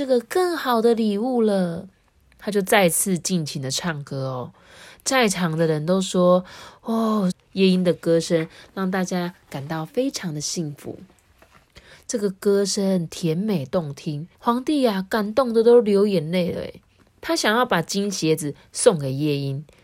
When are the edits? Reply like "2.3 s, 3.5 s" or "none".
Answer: 7.3 s, 11.9 s, 14.3 s